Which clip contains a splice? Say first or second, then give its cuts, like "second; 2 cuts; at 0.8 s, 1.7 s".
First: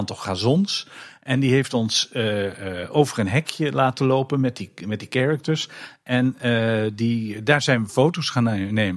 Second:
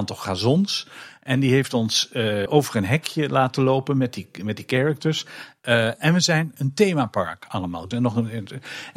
second; 3 cuts; at 2.5 s, 5.6 s, 7.9 s